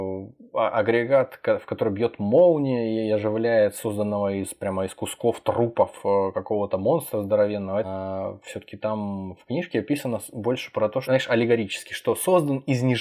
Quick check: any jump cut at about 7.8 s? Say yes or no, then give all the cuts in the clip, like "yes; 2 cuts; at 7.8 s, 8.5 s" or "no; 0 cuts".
yes; 2 cuts; at 7.8 s, 11.0 s